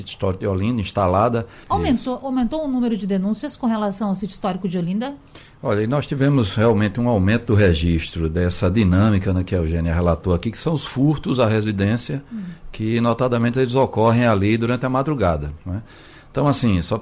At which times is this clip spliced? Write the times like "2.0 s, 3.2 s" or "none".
1.6 s